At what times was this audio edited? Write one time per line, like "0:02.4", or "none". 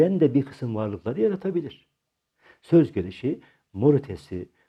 none